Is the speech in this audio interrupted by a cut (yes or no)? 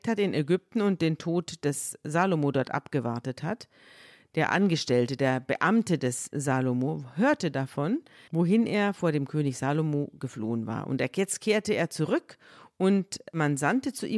yes